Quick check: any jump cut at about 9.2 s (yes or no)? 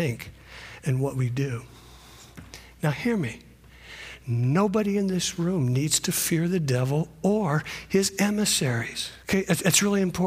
yes